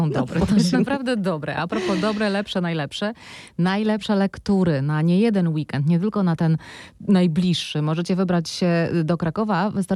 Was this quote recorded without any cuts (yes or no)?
yes